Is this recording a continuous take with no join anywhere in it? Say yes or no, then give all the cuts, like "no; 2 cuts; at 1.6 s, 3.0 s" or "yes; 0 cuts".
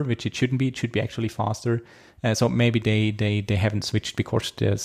yes; 0 cuts